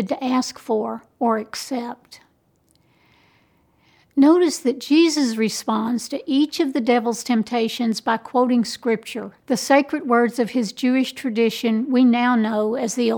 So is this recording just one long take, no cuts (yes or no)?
no